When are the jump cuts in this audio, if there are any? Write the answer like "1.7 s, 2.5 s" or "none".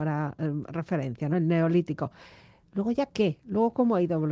none